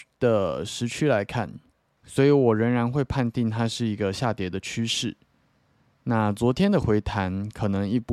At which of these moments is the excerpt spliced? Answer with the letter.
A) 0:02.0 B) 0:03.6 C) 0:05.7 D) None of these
A